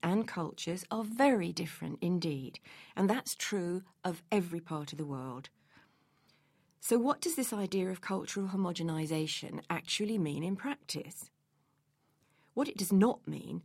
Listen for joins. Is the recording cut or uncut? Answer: uncut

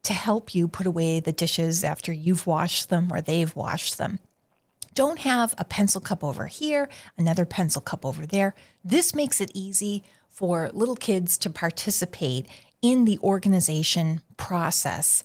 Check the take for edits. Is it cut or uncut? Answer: cut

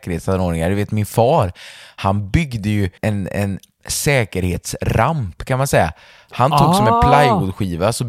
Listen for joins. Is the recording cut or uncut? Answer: cut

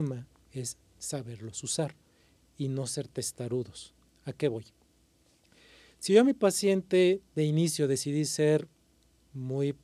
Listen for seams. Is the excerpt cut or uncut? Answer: uncut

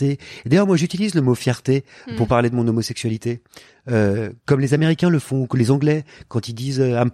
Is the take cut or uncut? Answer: uncut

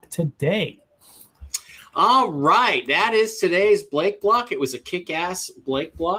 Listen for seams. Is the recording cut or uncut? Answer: uncut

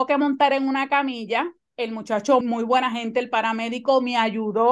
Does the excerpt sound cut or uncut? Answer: cut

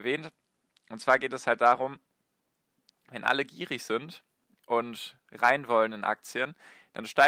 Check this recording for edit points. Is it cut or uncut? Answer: uncut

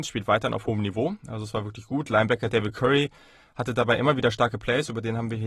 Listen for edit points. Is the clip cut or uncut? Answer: uncut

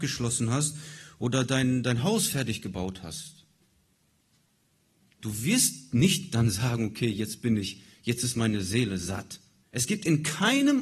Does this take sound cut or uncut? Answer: cut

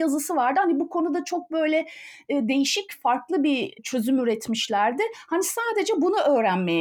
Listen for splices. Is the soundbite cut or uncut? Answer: uncut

